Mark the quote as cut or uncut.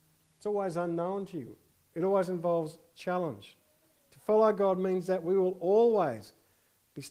cut